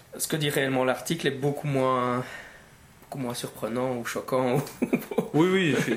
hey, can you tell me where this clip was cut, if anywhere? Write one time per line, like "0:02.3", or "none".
none